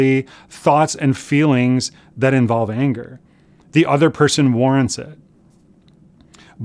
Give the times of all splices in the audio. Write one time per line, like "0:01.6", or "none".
none